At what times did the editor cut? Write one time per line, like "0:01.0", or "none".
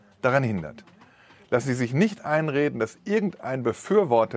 none